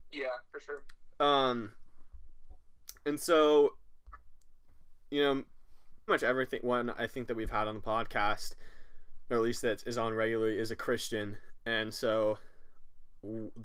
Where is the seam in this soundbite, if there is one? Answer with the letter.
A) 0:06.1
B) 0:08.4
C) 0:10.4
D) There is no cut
A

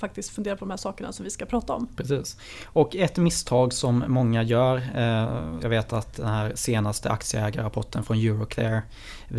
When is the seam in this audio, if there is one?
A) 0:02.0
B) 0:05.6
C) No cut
B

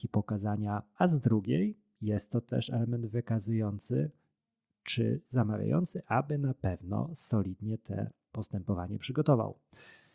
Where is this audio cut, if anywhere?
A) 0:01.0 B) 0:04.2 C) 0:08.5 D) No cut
A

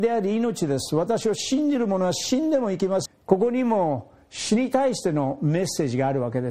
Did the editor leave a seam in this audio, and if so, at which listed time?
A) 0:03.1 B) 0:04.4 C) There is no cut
A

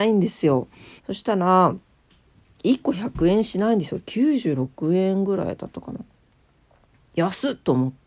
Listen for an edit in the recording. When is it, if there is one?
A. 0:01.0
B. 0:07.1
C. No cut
A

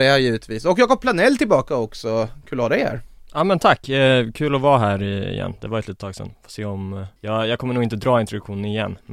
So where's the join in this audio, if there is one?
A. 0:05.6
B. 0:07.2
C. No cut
B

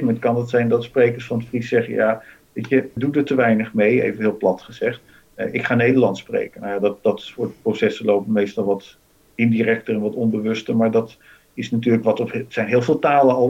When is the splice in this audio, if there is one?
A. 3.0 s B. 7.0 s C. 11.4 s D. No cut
A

